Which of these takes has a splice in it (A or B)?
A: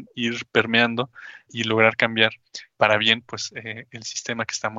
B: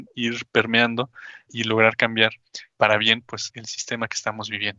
B